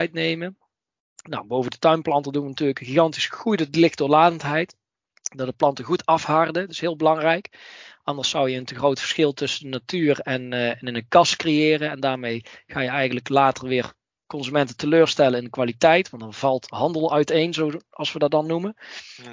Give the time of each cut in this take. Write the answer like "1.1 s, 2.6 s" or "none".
none